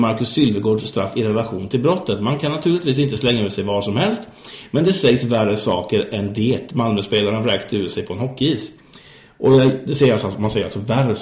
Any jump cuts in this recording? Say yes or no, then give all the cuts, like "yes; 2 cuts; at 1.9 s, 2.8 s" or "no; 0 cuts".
no; 0 cuts